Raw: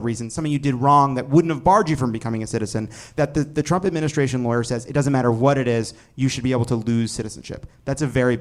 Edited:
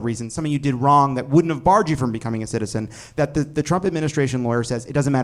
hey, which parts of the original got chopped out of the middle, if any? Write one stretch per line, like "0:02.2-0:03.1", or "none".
none

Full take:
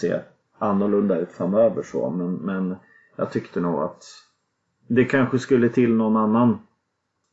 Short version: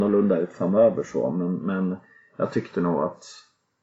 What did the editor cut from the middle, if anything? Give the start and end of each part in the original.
none

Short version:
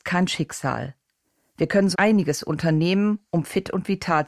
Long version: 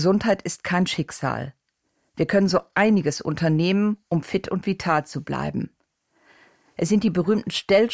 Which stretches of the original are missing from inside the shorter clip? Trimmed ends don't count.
0:02.5-0:02.7

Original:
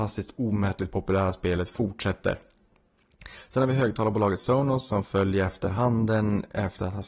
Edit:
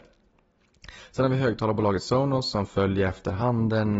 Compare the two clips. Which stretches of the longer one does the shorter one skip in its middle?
none

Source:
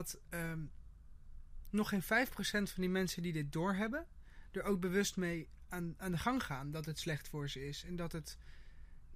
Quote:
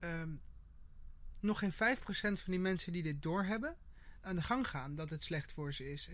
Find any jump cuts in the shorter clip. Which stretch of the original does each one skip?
0:04.5-0:06.0

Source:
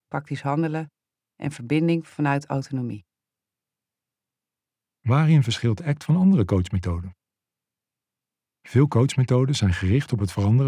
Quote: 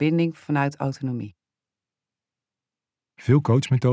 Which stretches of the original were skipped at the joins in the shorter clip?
0:04.7-0:08.5

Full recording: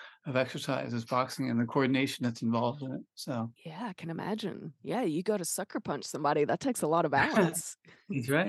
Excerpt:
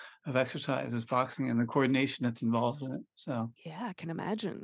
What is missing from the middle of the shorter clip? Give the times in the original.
none

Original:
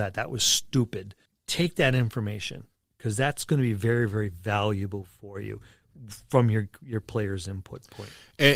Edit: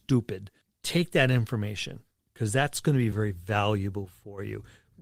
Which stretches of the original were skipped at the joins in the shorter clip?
0:03.8-0:04.1

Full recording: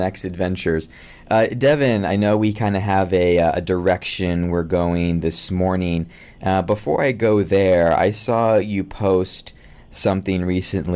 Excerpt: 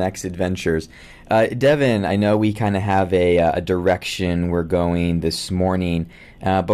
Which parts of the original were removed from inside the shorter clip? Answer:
none

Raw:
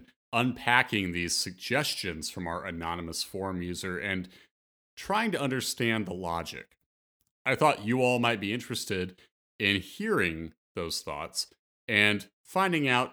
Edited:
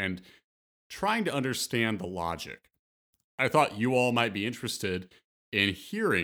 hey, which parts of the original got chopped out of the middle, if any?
none

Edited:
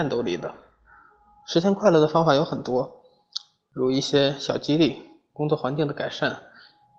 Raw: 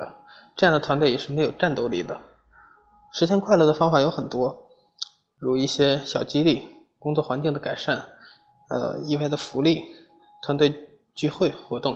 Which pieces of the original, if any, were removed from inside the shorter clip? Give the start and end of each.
none

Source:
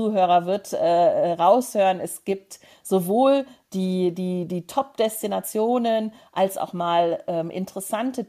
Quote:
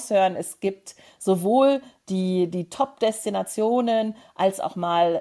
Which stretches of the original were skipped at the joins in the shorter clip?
0:04.1-0:04.5

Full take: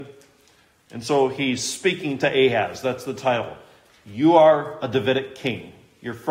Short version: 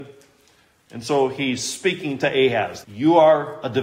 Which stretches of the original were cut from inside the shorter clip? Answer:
0:02.8-0:04.0

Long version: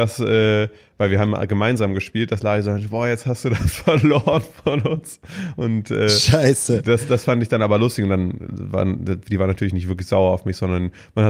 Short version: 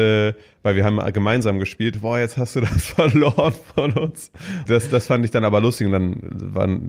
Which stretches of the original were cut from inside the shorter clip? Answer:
0:02.3-0:02.8
0:05.5-0:06.8

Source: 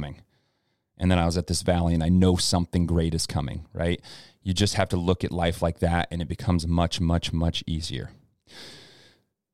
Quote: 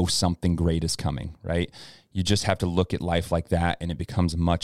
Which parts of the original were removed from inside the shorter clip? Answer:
none

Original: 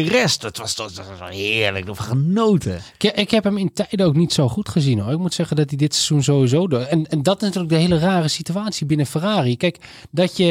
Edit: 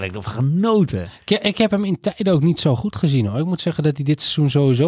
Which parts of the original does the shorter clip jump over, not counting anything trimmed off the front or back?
none

